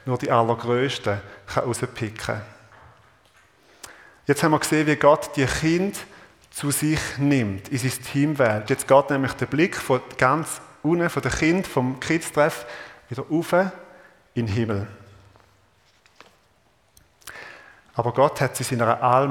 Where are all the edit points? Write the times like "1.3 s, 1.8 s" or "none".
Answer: 8.7 s, 11.7 s, 17.8 s